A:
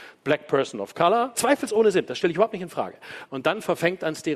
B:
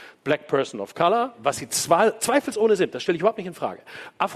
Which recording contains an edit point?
A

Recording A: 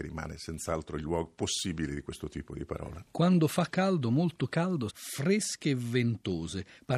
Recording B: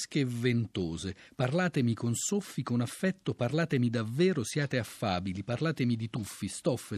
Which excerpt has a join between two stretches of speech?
A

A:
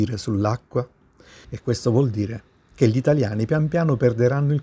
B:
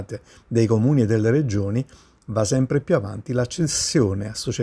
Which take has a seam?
A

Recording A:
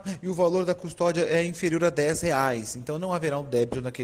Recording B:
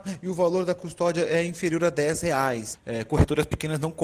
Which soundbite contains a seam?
B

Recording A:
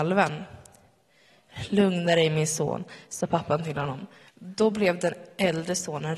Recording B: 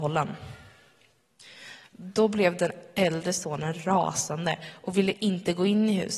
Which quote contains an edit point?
A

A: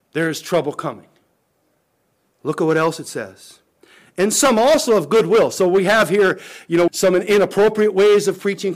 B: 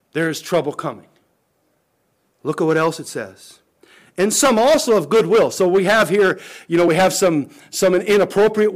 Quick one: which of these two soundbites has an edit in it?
A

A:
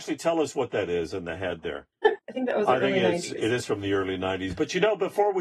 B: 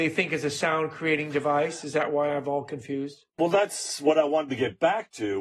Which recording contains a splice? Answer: A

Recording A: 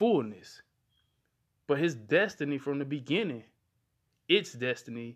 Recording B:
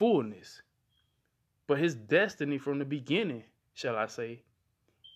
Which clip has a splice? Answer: B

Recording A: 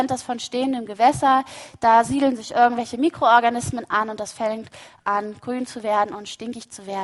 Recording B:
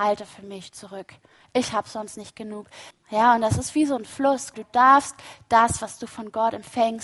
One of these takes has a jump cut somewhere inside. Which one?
B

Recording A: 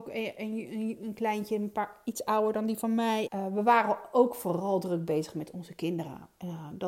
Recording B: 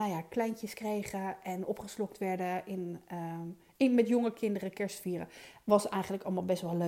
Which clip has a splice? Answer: A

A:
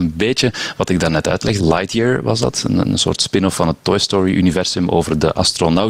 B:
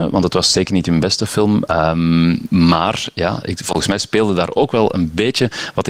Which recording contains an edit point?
A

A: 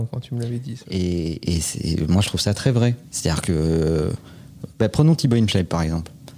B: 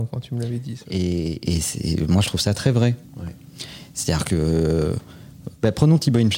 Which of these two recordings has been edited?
A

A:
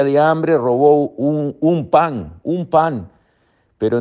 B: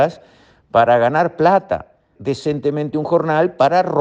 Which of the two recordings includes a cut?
B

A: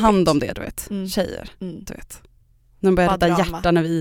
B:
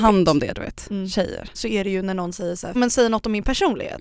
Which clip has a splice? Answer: B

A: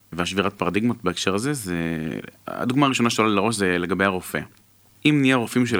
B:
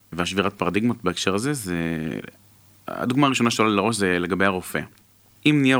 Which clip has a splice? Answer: A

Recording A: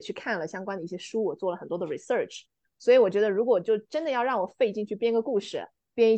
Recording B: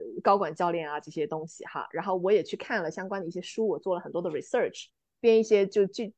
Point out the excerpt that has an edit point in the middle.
B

